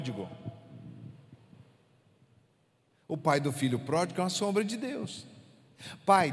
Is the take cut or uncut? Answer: uncut